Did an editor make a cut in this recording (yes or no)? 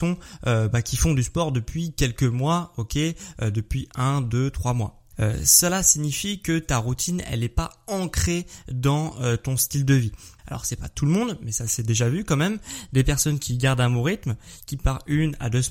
yes